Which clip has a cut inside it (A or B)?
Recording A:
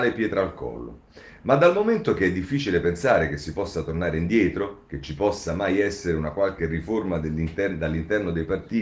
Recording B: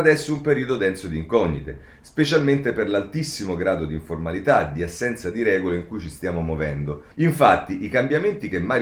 B